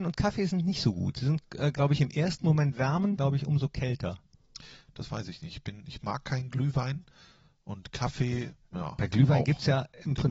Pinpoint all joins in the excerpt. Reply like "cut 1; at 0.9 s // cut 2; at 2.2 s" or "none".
cut 1; at 3.2 s